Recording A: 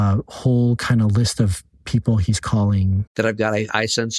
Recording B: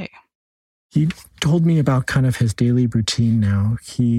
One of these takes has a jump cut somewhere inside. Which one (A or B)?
A